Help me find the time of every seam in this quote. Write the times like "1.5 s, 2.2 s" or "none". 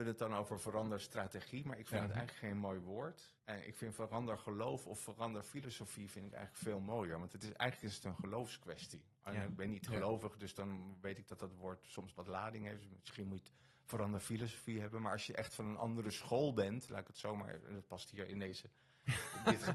3.4 s